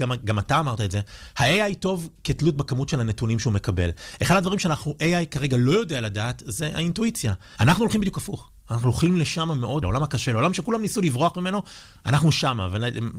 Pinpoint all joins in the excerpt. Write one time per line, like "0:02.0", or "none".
0:07.6
0:09.8